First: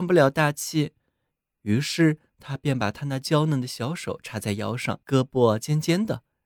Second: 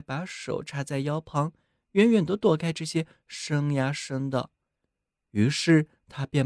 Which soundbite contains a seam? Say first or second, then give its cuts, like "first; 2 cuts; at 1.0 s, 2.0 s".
first; 2 cuts; at 1.4 s, 5.0 s